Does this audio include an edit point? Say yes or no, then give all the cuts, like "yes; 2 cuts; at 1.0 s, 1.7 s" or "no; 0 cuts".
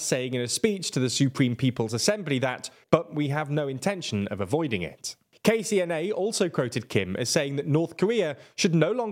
yes; 1 cut; at 2.8 s